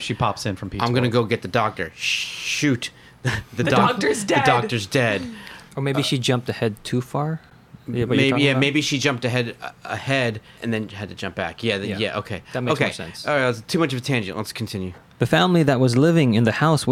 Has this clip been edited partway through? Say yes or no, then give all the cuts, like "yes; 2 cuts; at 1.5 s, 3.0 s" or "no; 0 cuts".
yes; 1 cut; at 5.7 s